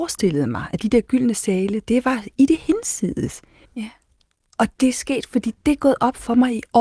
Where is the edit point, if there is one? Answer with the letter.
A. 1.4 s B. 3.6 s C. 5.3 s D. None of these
B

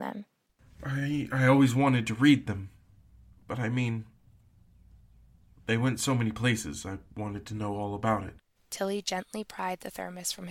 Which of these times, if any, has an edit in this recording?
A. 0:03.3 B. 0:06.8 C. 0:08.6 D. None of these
C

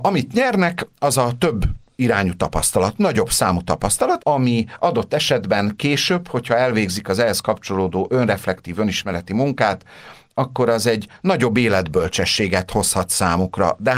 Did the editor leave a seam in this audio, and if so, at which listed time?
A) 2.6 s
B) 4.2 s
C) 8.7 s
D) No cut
B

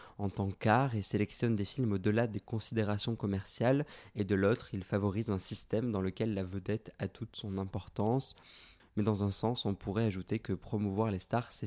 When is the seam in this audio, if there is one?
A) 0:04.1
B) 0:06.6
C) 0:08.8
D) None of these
C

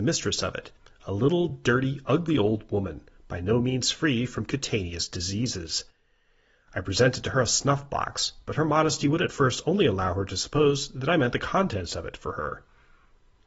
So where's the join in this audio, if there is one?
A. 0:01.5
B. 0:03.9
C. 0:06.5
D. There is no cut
D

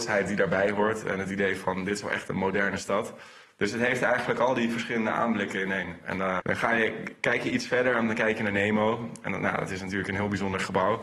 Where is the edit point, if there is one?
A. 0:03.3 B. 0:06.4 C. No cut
B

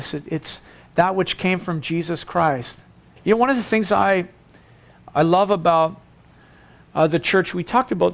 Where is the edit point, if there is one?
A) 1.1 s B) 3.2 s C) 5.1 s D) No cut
B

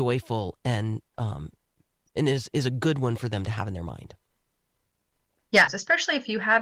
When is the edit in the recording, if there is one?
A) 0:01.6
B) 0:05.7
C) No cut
B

